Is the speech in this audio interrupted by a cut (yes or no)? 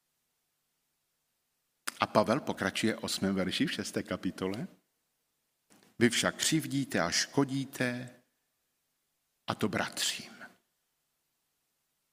no